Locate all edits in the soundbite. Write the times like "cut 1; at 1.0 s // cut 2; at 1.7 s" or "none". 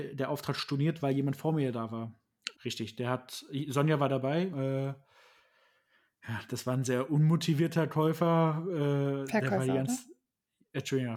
cut 1; at 2.5 s // cut 2; at 4.5 s

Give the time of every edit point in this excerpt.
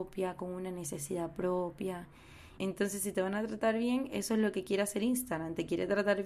cut 1; at 2.6 s

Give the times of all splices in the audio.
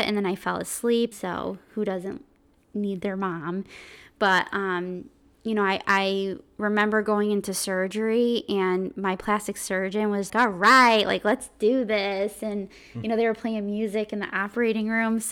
cut 1; at 1.1 s // cut 2; at 10.3 s

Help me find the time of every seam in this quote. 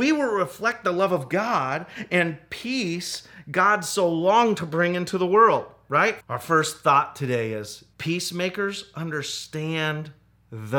cut 1; at 6.2 s // cut 2; at 7.9 s

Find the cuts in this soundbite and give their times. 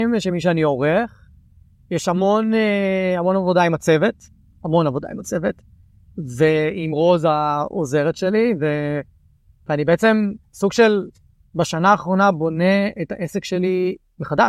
none

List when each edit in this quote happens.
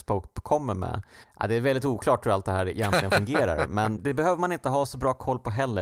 cut 1; at 1.2 s // cut 2; at 4.0 s

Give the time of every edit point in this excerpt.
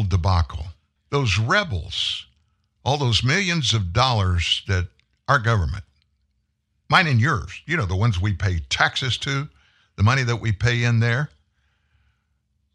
cut 1; at 1.0 s

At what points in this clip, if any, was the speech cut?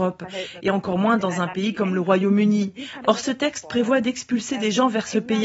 cut 1; at 3.0 s

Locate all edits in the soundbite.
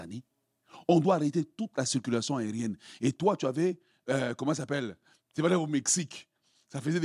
none

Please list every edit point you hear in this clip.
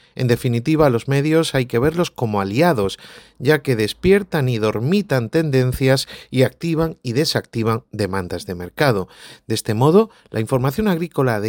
none

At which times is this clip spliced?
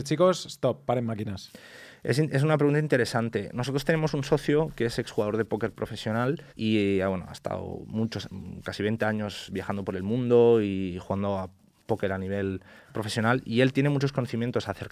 cut 1; at 6.5 s

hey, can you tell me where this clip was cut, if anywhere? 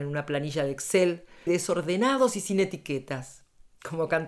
cut 1; at 1.5 s

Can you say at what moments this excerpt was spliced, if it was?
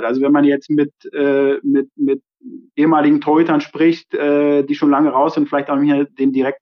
none

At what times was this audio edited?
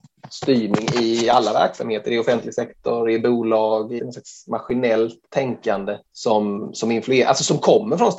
cut 1; at 4.0 s // cut 2; at 6.1 s

